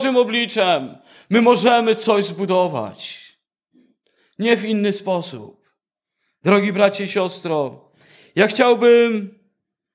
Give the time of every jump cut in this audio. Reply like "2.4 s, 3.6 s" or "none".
none